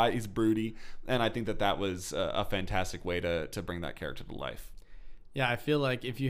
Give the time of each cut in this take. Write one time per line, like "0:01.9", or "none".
none

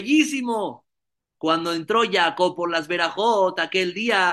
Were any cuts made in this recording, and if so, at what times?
0:01.4

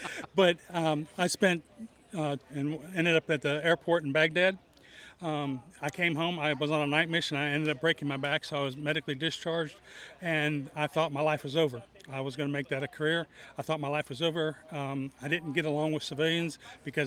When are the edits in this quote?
0:02.5

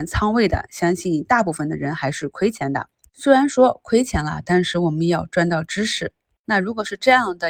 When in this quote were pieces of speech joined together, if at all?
none

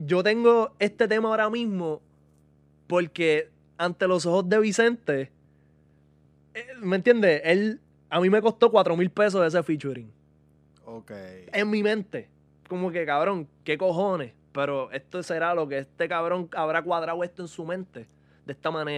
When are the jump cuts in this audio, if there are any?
none

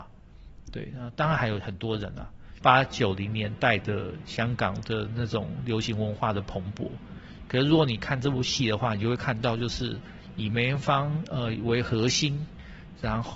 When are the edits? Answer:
0:02.6

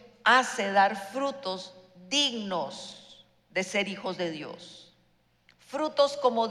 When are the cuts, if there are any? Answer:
none

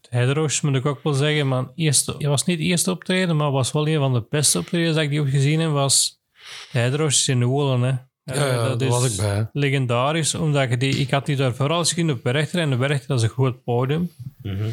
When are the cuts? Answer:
0:02.2

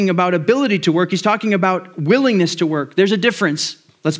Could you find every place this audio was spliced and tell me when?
none

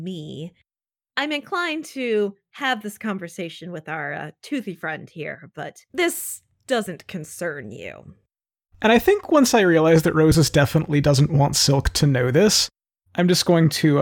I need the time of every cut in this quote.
0:05.9

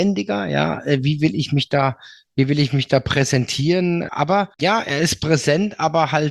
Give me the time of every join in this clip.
0:04.1

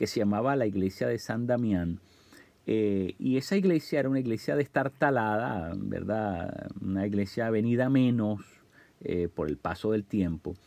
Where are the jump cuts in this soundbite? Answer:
0:09.3

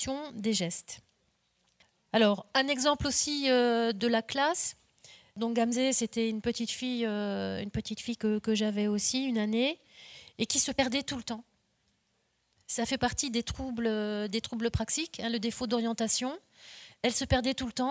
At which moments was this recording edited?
none

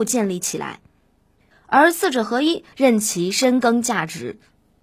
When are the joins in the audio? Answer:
0:01.5
0:02.7

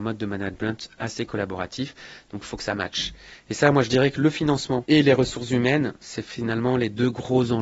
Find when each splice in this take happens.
none

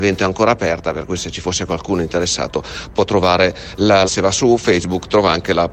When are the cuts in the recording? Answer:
0:04.1

